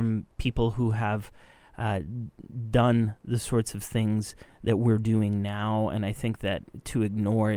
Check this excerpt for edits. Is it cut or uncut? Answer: uncut